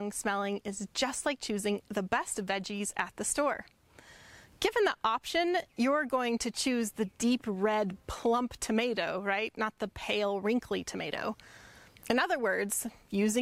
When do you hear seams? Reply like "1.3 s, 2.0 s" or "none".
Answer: none